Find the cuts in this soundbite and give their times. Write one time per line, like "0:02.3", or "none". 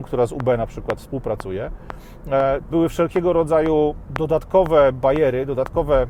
0:02.7

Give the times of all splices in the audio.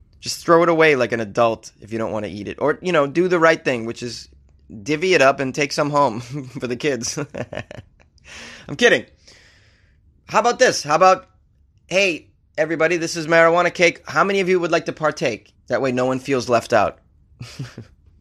0:15.5

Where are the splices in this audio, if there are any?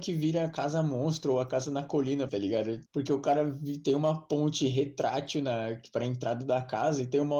0:02.3

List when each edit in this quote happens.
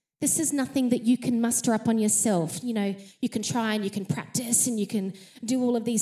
none

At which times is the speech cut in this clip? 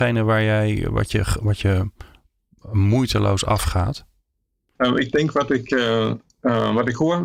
0:04.8

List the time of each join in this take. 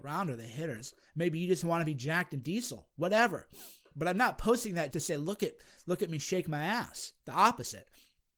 0:01.1
0:04.9

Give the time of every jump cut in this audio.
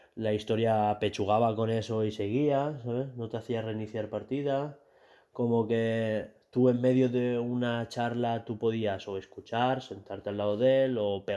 none

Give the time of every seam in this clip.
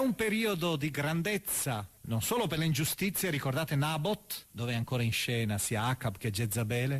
0:02.0
0:04.5

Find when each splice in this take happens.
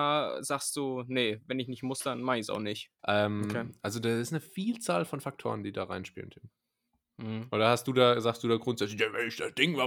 0:03.0

